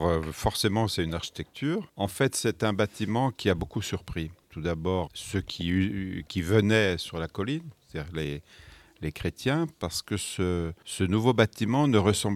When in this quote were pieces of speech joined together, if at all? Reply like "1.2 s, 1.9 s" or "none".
5.1 s